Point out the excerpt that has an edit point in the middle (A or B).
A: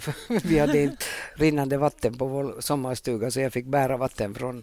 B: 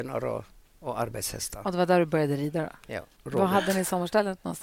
B